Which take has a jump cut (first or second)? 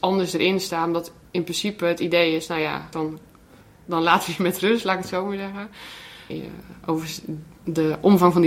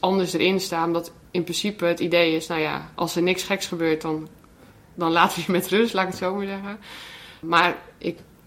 first